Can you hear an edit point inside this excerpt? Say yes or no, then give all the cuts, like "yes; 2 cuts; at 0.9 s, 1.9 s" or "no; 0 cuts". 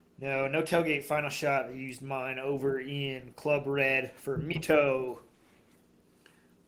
no; 0 cuts